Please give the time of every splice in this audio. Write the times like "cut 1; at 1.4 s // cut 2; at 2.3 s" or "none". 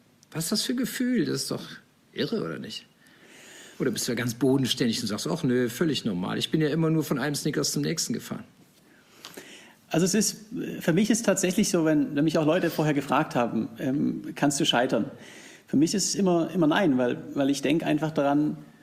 none